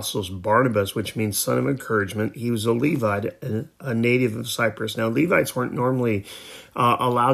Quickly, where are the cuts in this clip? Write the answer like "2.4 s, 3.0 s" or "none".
none